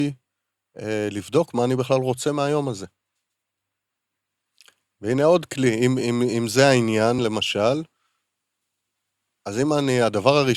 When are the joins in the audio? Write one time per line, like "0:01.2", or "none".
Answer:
none